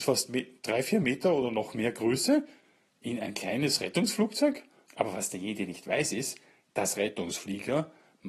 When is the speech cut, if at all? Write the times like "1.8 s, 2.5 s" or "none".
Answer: 4.8 s